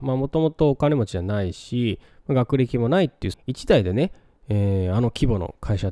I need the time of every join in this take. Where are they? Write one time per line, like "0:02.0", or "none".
0:03.3